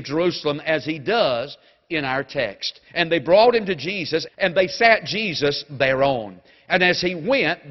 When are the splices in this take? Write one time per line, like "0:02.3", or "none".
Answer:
0:02.9
0:04.3